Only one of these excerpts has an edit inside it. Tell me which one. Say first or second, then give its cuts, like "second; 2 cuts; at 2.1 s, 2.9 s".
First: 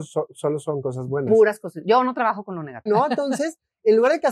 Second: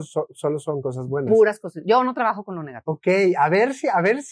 first; 1 cut; at 2.9 s